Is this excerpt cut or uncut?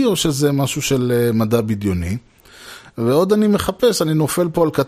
uncut